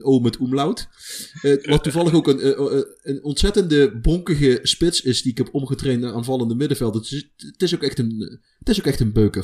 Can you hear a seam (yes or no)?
no